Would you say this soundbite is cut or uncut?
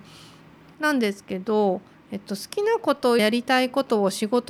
cut